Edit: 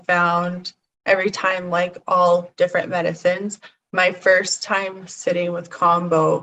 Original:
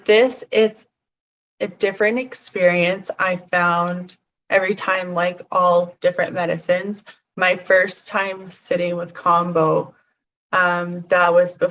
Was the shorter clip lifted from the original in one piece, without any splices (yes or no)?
yes